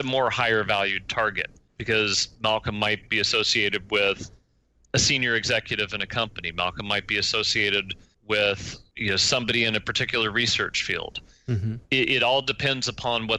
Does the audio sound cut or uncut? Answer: uncut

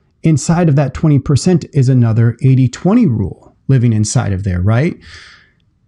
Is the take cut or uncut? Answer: uncut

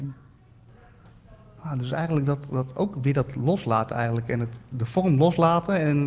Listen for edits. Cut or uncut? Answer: uncut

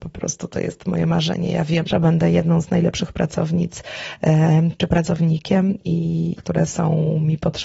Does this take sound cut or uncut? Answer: cut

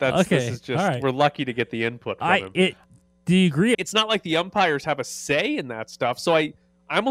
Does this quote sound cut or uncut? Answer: cut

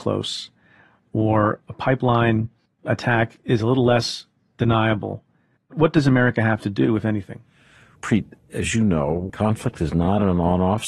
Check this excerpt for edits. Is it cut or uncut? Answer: cut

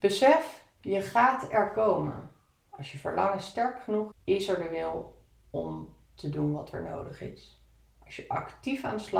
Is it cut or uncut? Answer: cut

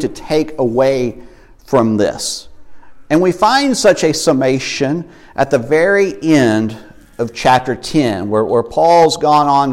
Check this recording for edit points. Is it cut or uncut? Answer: uncut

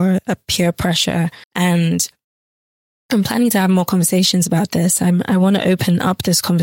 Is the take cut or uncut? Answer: cut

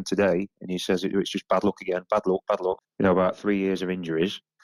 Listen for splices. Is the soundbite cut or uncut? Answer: cut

